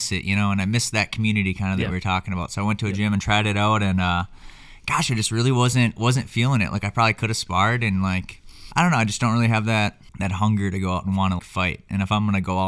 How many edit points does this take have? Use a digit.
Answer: 2